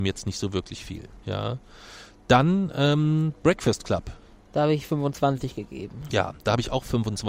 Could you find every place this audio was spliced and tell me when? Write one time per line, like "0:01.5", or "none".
none